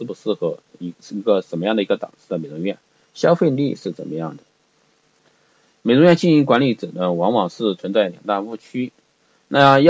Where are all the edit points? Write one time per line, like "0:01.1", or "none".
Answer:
0:05.7